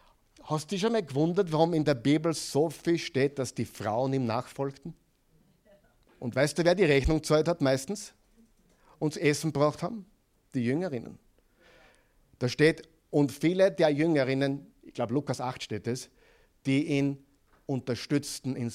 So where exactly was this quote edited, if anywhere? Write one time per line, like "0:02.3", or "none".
0:06.1